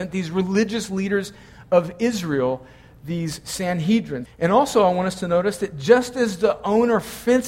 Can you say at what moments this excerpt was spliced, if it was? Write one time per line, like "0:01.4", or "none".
0:04.3